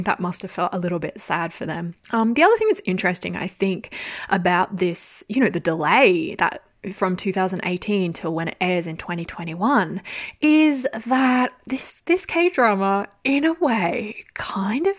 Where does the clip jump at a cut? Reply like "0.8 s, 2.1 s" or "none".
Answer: 2.0 s